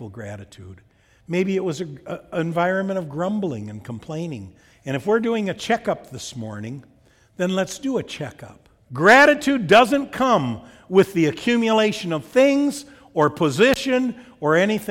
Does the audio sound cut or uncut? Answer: cut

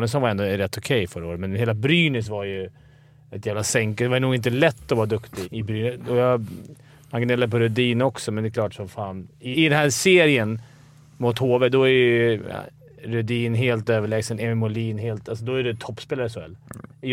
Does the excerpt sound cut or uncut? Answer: cut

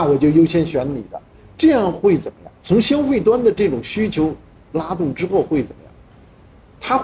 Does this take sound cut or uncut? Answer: uncut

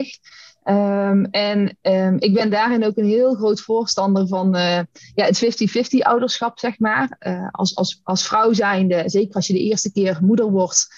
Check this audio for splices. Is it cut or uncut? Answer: uncut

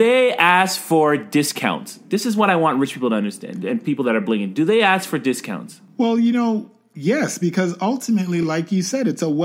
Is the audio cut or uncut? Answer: uncut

